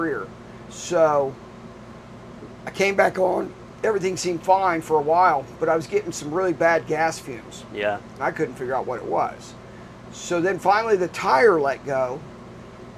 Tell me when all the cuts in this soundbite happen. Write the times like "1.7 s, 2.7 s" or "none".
8.2 s